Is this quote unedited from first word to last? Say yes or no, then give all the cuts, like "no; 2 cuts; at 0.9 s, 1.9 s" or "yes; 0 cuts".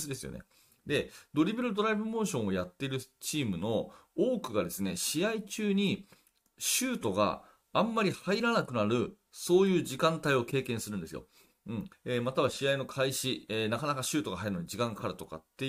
no; 1 cut; at 11.9 s